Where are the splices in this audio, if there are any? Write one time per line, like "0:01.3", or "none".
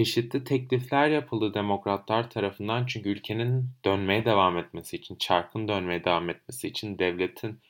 none

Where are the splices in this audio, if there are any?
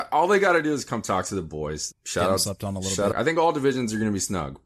0:01.9
0:03.1

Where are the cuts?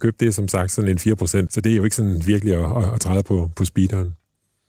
0:01.5

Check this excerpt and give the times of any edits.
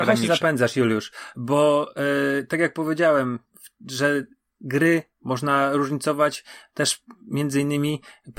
none

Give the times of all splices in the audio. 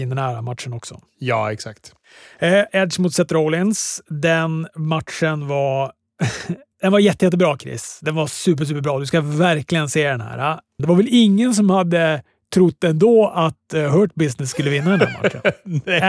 0:02.7
0:10.8

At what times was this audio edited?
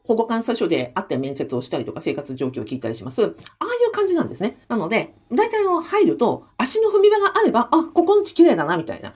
0:03.5
0:04.6

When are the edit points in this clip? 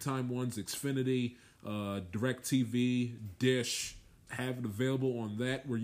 0:04.3

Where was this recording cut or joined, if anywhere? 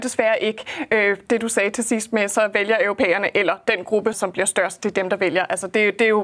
0:04.1

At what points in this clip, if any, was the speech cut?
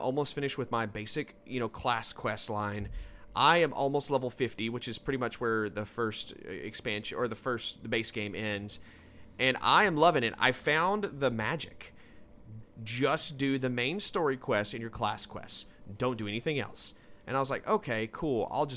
0:12.6

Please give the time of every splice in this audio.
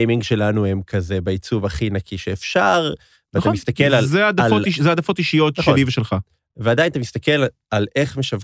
none

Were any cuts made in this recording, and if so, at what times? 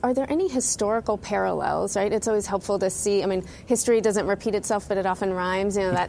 none

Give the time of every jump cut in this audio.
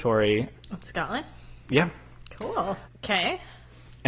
0:02.9

